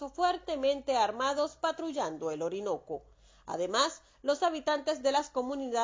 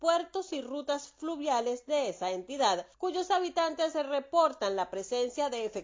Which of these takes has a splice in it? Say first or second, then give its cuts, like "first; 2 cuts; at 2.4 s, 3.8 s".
second; 1 cut; at 2.9 s